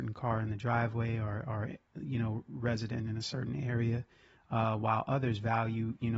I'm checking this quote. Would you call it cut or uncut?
uncut